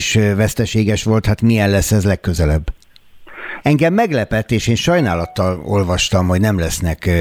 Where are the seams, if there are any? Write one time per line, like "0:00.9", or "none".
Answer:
0:03.6